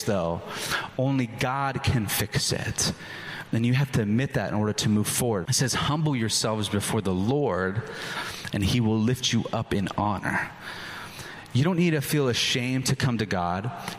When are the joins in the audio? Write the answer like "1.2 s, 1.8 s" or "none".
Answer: 5.5 s